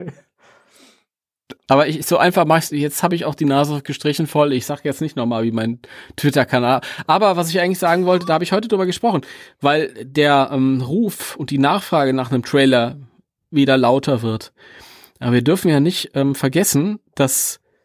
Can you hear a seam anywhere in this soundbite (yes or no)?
no